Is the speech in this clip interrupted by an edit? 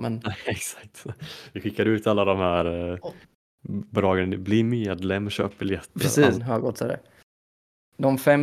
yes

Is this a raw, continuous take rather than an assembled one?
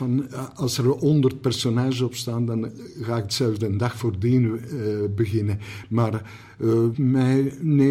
no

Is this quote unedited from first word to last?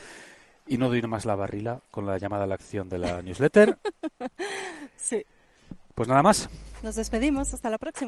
yes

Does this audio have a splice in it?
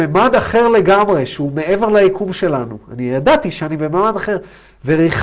no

